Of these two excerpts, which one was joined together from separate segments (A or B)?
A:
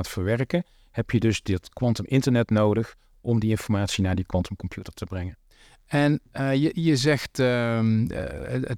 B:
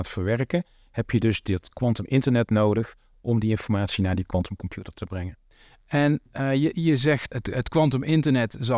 B